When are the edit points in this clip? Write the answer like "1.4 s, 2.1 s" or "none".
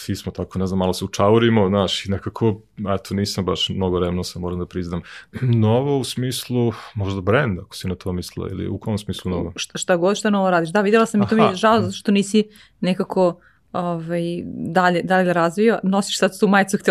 5.3 s